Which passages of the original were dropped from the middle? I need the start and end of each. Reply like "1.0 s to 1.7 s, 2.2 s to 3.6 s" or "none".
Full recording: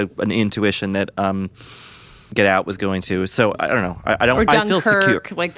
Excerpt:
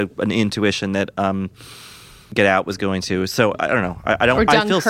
none